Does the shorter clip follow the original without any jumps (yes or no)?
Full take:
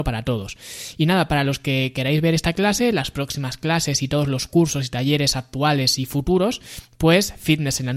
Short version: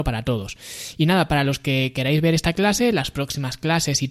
yes